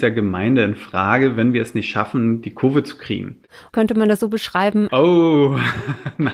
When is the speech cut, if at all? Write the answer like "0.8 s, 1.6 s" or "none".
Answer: 3.7 s, 4.9 s